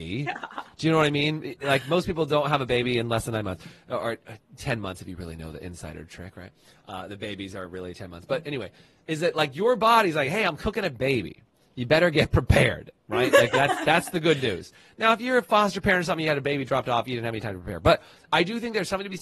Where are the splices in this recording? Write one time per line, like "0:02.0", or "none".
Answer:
none